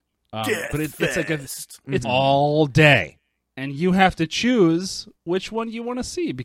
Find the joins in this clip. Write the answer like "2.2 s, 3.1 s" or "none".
2.0 s